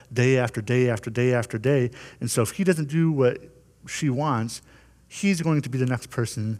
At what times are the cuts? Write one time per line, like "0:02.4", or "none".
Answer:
none

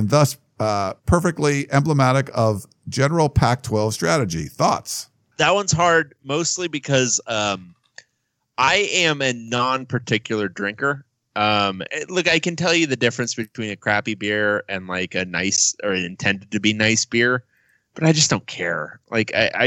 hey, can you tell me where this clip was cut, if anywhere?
0:01.0
0:05.3
0:11.9

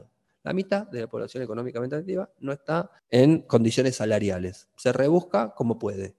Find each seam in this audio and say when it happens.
0:03.0

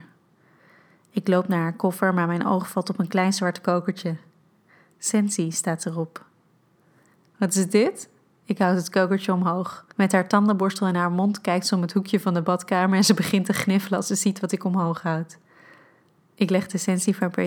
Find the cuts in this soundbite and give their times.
0:09.9
0:16.2

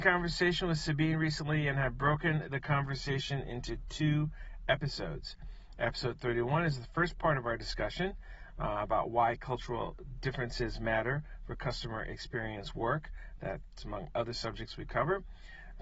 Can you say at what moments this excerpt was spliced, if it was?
none

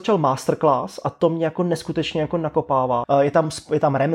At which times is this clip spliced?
0:03.0

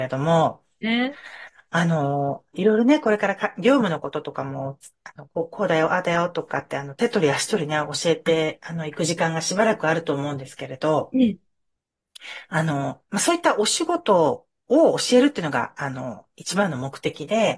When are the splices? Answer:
0:02.5

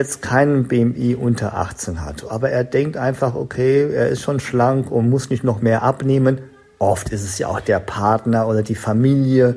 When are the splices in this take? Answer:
0:05.6

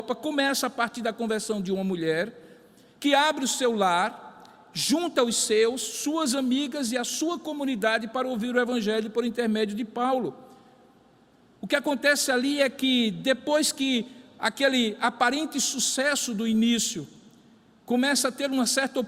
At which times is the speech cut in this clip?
none

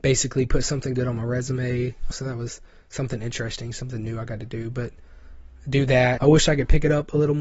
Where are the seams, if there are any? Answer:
0:02.1
0:06.2

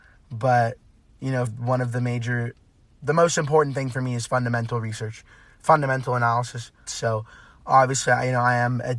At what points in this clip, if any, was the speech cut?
0:01.5
0:06.9

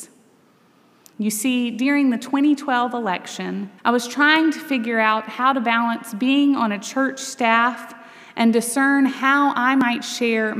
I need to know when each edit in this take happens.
0:01.1
0:03.8

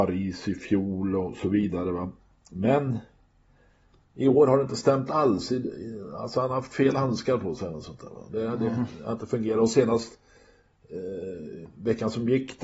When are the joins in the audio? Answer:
none

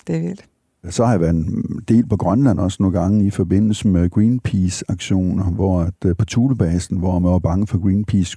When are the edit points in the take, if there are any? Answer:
none

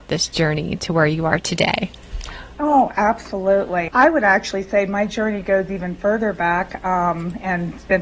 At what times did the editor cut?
0:03.9

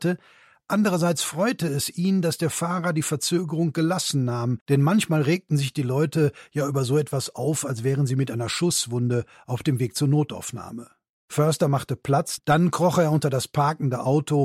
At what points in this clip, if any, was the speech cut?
0:12.4

